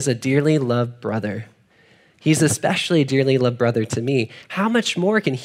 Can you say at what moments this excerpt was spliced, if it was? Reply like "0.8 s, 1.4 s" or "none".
none